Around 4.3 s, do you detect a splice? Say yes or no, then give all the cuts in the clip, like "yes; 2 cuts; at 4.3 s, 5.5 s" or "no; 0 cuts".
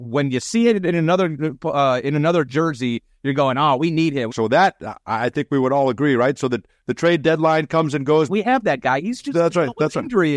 yes; 2 cuts; at 4.3 s, 8.3 s